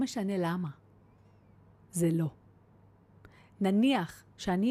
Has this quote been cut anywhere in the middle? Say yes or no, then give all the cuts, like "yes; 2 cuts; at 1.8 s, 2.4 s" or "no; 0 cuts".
no; 0 cuts